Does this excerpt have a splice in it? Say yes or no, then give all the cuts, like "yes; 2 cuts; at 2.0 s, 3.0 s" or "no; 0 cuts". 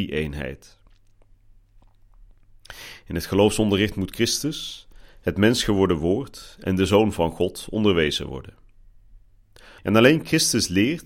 yes; 1 cut; at 9.8 s